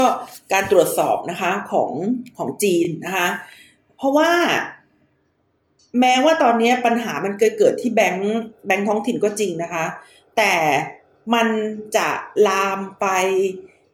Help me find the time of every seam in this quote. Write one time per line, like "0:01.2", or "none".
none